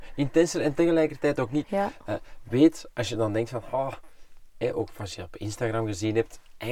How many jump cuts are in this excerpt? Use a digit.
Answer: 1